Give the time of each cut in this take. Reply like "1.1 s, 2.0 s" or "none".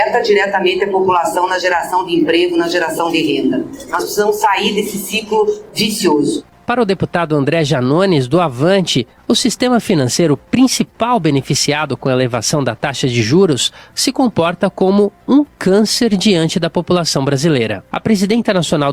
17.9 s

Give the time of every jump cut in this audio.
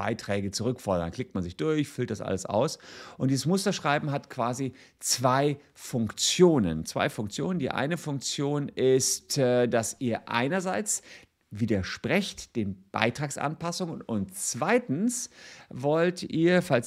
none

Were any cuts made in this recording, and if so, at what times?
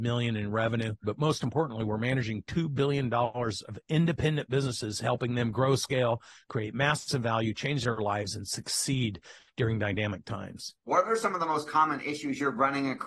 1.0 s, 10.9 s

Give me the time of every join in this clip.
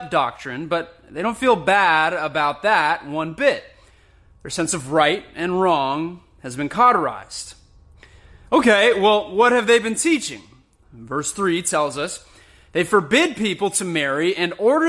none

